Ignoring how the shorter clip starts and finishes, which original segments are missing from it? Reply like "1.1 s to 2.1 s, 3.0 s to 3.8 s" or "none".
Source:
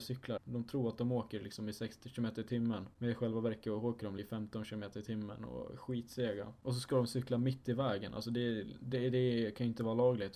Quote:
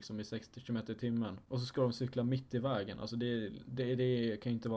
3.0 s to 6.6 s